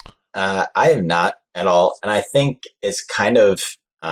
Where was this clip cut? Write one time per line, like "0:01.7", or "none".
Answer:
none